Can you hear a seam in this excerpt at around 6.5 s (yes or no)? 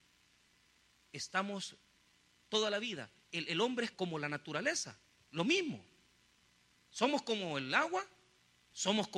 no